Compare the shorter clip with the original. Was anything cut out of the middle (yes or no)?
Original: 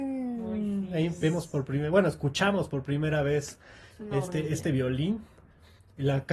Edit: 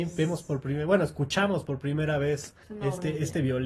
yes